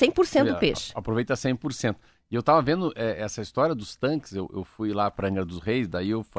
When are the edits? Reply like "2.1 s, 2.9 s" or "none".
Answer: none